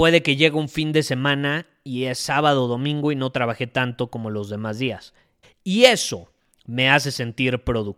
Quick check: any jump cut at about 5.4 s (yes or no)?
yes